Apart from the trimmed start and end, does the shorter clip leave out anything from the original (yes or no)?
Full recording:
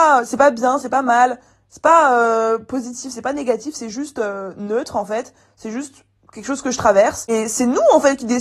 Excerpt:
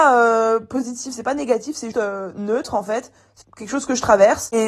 yes